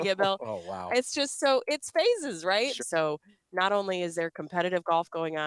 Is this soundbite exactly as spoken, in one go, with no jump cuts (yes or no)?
no